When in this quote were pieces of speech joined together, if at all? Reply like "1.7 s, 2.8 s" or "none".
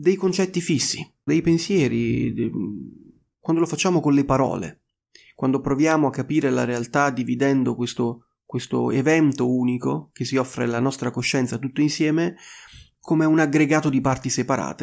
1.3 s